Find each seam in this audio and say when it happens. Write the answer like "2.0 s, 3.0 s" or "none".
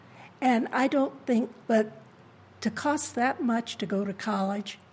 1.6 s